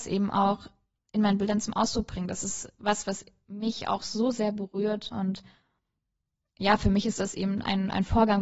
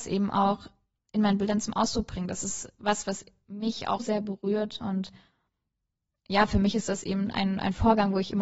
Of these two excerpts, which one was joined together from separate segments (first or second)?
second